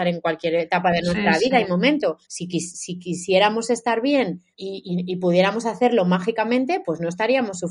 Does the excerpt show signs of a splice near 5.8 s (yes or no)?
no